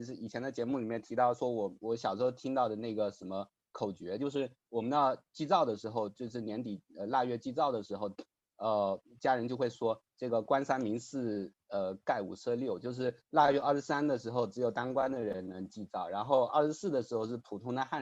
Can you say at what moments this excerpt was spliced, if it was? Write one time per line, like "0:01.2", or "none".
none